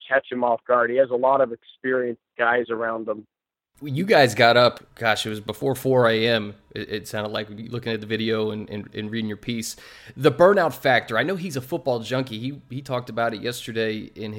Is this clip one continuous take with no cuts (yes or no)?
yes